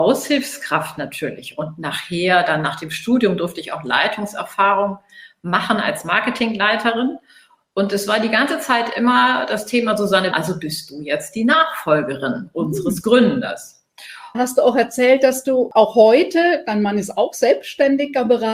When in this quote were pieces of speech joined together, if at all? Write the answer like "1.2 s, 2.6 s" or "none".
10.3 s, 14.3 s